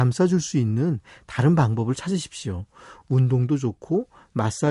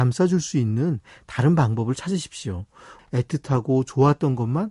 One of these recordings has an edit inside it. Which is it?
second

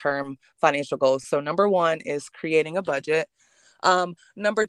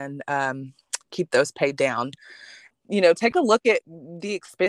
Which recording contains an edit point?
second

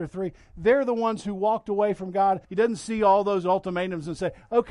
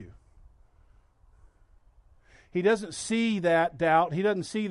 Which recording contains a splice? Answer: first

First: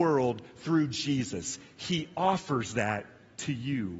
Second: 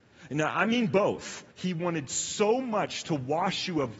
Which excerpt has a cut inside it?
second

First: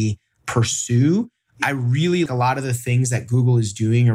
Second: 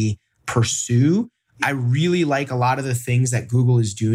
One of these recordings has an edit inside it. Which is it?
first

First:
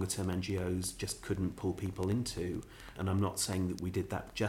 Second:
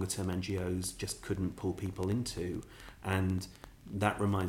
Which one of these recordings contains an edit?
first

